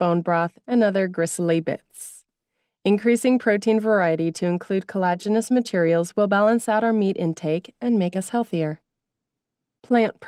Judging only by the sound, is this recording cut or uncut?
uncut